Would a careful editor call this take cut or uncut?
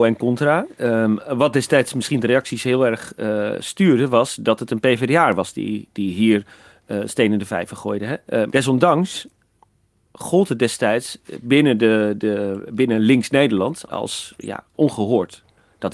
cut